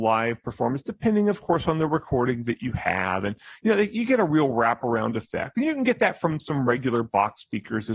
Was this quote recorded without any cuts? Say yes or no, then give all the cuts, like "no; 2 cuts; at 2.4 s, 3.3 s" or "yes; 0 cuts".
yes; 0 cuts